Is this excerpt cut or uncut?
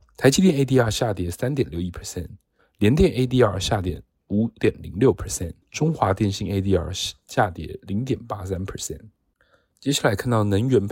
cut